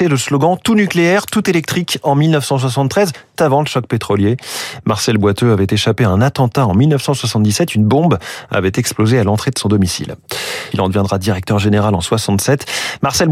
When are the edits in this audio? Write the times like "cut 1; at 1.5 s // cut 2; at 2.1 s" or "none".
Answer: cut 1; at 3.4 s // cut 2; at 10.7 s